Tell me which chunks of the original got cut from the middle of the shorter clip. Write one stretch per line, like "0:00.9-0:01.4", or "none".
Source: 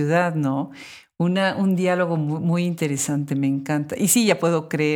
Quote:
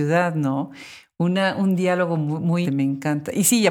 0:02.6-0:03.3